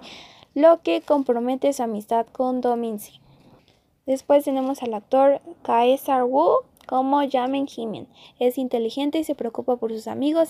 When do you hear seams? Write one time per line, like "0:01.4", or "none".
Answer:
0:05.6
0:08.2